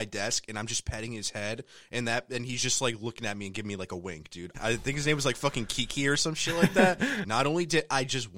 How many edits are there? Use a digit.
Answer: 2